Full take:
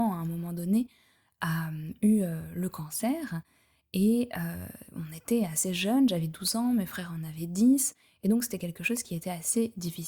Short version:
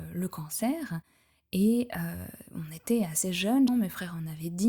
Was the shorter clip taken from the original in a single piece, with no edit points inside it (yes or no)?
no